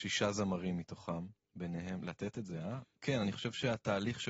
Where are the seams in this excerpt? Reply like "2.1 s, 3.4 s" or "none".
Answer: 1.4 s, 3.0 s